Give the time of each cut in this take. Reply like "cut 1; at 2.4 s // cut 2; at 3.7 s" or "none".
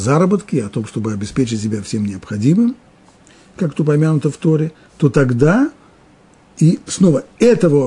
none